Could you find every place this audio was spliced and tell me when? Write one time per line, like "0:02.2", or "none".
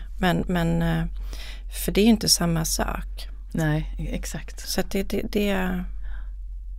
none